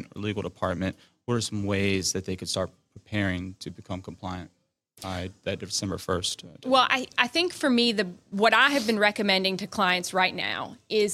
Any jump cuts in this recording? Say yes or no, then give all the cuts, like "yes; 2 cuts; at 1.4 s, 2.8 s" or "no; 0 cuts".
no; 0 cuts